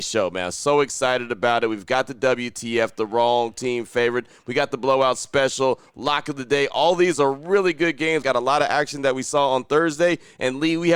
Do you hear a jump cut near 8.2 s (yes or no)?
yes